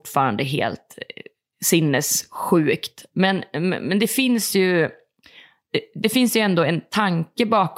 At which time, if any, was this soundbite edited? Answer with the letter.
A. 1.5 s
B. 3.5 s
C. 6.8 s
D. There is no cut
D